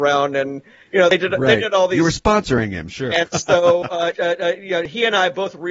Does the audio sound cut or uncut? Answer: cut